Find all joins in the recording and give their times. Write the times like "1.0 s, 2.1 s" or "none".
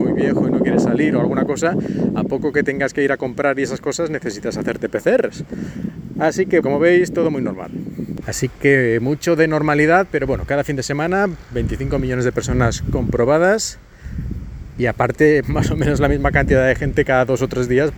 6.6 s, 8.2 s, 15.4 s